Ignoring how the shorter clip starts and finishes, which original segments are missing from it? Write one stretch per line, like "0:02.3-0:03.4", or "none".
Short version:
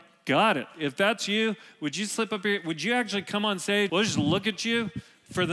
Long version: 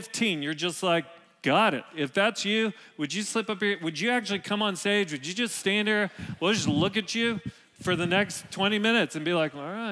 0:05.1-0:06.4